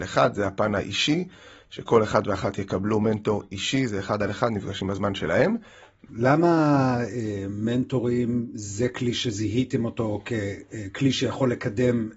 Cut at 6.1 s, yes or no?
yes